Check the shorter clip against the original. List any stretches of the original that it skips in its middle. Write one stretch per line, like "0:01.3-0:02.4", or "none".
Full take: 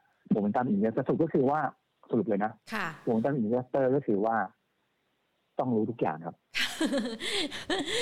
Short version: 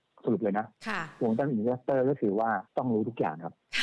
0:04.5-0:05.5